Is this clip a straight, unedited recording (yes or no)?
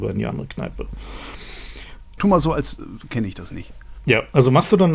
no